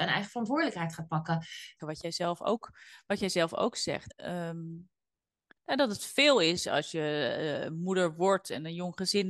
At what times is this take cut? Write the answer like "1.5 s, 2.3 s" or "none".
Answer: 1.8 s, 4.1 s